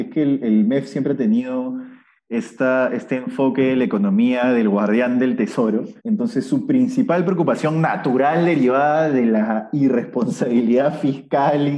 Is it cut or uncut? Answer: cut